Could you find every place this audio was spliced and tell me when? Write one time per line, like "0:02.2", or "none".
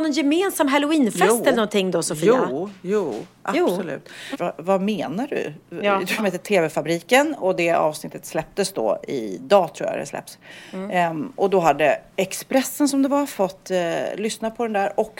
0:04.3
0:06.2